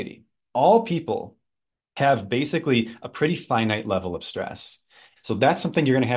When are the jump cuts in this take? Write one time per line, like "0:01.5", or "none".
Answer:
0:05.2